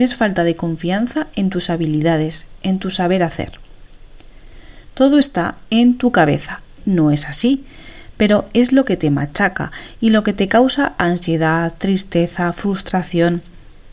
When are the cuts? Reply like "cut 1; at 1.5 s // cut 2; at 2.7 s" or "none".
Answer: cut 1; at 6.8 s